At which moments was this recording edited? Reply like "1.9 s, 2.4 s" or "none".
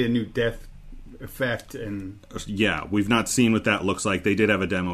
none